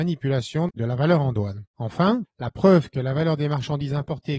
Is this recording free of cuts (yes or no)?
no